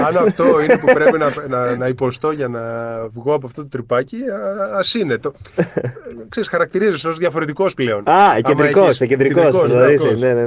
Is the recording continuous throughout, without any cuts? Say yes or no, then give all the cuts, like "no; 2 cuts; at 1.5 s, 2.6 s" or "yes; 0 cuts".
no; 1 cut; at 1.8 s